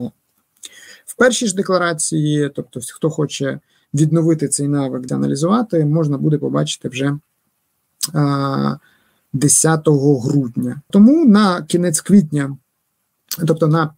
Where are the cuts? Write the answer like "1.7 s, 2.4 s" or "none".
5.1 s, 10.9 s